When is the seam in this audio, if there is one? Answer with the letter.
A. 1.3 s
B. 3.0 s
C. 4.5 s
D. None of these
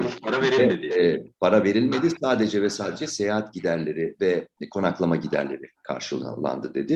D